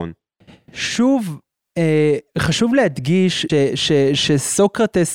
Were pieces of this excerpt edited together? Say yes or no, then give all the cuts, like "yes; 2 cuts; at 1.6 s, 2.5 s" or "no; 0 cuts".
yes; 1 cut; at 3.5 s